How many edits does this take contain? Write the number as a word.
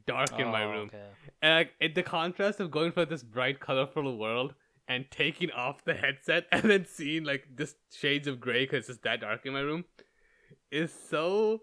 zero